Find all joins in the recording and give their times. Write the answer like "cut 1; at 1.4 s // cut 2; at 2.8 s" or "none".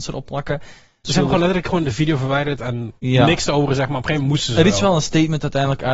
cut 1; at 1.0 s // cut 2; at 3.0 s

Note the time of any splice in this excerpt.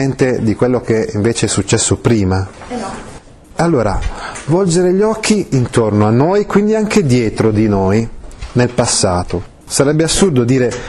none

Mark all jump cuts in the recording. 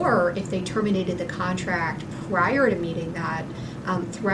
none

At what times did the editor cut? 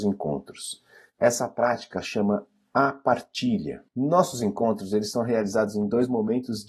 cut 1; at 3.9 s

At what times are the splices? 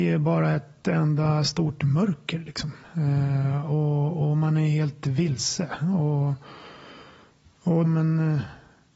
cut 1; at 7.8 s

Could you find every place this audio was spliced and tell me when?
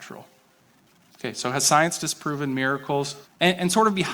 cut 1; at 3.2 s

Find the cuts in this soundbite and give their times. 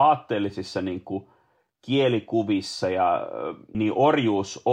cut 1; at 3.7 s

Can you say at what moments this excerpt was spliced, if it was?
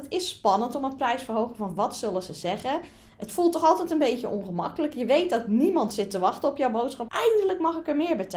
cut 1; at 7.1 s

